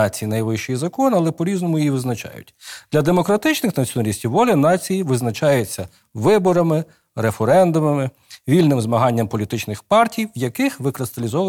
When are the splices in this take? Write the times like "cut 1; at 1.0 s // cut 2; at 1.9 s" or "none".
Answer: none